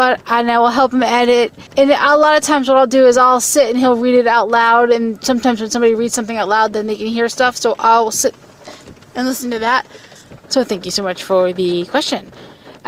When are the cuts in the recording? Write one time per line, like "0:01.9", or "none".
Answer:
0:01.7
0:10.4